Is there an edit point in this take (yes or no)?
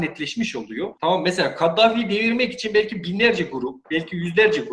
yes